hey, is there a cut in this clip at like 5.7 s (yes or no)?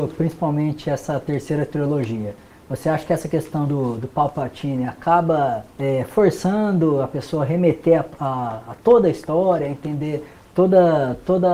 yes